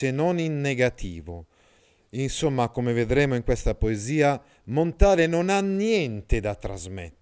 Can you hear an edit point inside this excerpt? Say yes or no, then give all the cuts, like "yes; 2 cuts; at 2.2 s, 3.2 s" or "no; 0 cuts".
no; 0 cuts